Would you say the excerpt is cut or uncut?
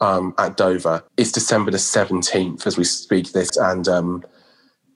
cut